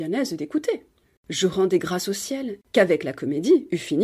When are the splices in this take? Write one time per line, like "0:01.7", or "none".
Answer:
0:01.2
0:02.6